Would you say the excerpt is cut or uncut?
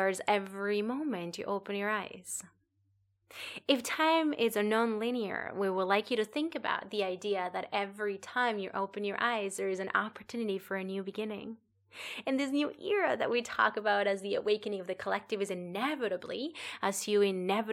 uncut